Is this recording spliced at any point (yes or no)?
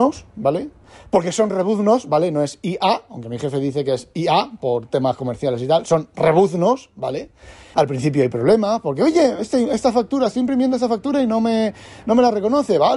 yes